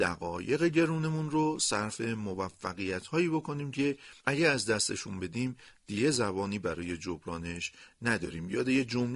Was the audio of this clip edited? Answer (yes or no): yes